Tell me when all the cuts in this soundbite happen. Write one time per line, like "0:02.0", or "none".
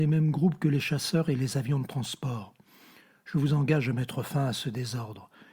none